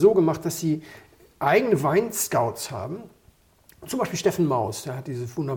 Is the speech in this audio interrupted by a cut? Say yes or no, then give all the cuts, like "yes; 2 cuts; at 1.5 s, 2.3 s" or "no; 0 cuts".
no; 0 cuts